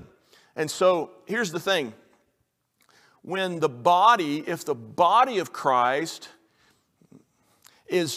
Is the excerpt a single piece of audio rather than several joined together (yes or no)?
yes